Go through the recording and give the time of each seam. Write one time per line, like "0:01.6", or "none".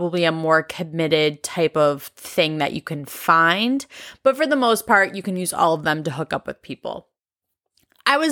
none